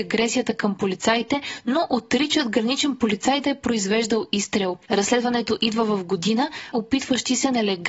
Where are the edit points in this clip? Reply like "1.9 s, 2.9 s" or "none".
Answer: 4.9 s, 6.7 s